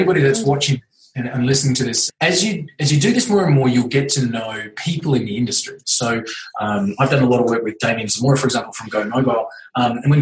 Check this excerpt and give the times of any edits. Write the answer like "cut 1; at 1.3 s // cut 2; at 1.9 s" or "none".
cut 1; at 2.1 s // cut 2; at 5.8 s